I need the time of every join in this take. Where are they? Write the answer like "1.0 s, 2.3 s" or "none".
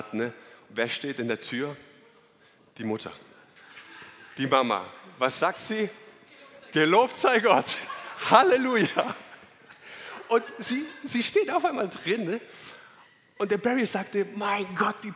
none